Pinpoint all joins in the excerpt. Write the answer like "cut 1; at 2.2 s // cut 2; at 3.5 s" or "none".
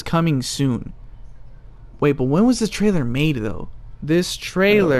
cut 1; at 4.0 s